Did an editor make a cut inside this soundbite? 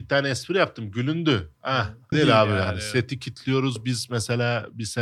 yes; 1 cut; at 2.1 s

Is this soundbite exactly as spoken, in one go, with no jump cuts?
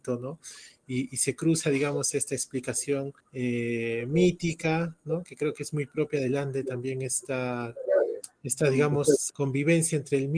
no; 2 cuts; at 3.2 s, 9.3 s

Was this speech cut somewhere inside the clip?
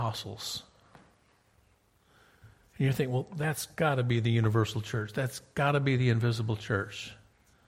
no; 0 cuts

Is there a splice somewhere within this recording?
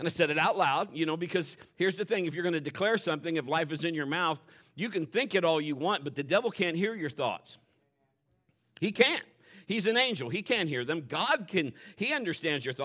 no; 0 cuts

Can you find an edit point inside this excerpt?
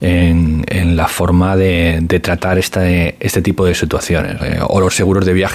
yes; 1 cut; at 4.4 s

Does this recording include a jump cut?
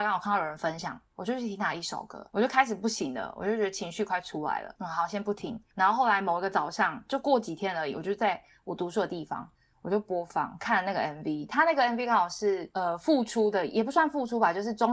no; 0 cuts

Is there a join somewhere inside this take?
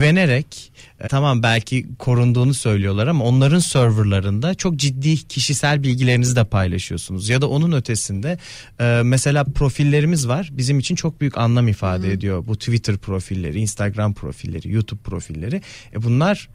yes; 1 cut; at 1.1 s

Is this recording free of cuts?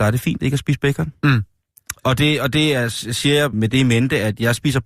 no; 1 cut; at 3.5 s

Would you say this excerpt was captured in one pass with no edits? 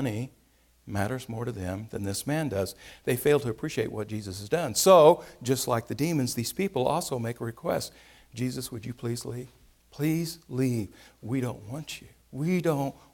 yes; 0 cuts

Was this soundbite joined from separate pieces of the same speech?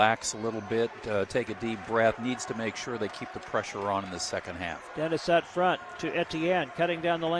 yes; 1 cut; at 2.2 s

